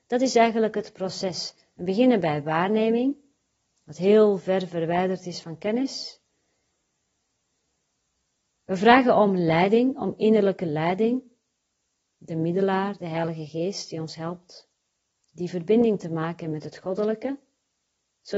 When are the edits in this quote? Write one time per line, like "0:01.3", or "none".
none